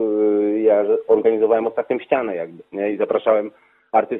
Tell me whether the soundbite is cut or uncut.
uncut